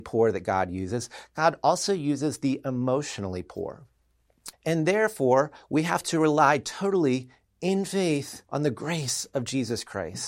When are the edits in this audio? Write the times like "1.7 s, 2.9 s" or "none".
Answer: 4.5 s, 8.4 s